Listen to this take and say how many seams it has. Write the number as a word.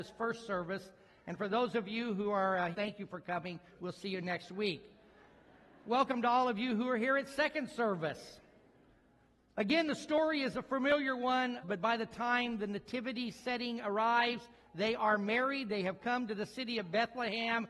two